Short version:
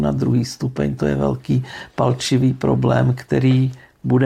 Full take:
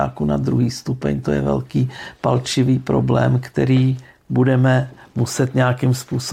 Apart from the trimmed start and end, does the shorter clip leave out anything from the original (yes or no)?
no